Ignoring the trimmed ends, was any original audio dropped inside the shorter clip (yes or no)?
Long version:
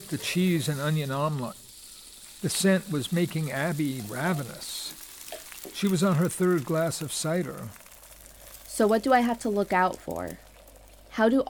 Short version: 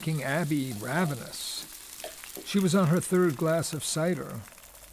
no